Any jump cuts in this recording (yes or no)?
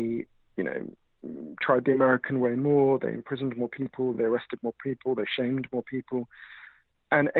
no